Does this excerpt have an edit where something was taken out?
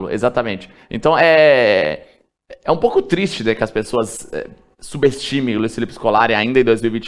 no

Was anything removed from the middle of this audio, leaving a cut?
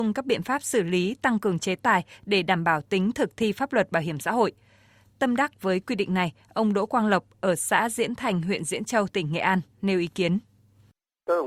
no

